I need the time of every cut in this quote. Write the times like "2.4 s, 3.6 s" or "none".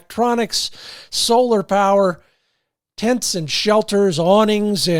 none